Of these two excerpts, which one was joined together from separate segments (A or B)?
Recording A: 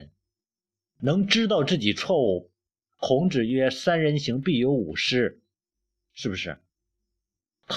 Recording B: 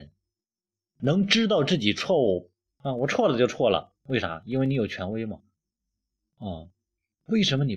B